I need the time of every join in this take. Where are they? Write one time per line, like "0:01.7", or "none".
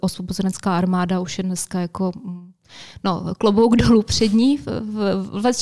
none